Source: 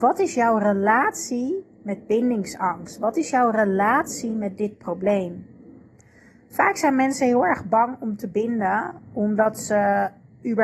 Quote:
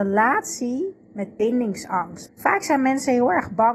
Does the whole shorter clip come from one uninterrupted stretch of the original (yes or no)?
no